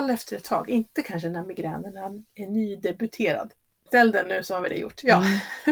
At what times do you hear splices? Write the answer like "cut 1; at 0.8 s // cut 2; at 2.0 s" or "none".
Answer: cut 1; at 3.9 s